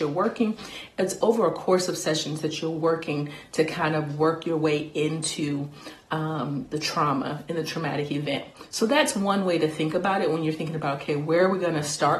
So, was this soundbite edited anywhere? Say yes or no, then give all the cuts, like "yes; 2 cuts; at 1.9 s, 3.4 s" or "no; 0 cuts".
no; 0 cuts